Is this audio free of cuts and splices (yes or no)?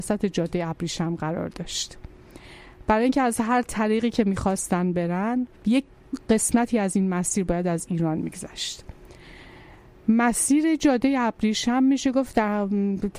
no